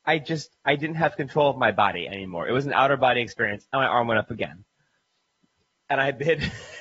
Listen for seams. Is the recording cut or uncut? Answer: uncut